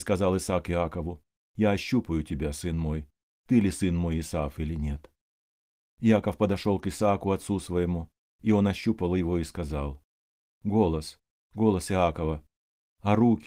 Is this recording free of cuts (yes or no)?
no